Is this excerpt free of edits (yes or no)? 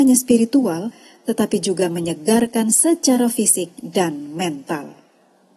yes